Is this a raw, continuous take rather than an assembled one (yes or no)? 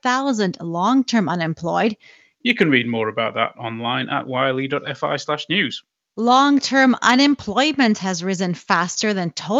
no